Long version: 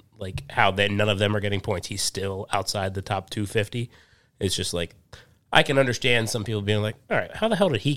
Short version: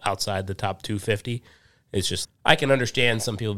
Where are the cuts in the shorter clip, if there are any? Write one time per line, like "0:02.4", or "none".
0:02.2